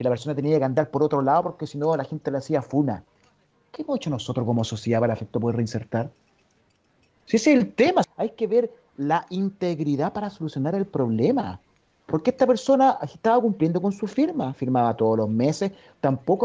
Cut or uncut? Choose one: cut